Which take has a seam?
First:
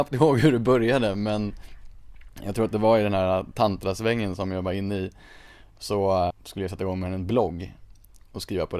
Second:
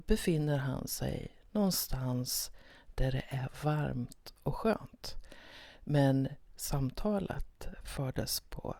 first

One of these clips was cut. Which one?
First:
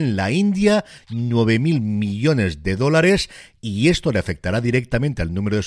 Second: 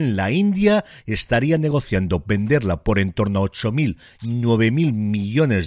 first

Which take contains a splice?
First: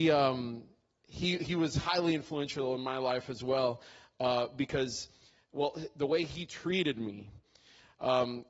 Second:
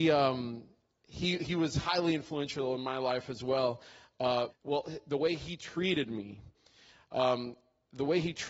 second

